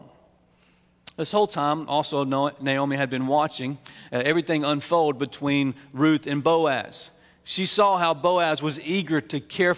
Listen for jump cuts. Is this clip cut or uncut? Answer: uncut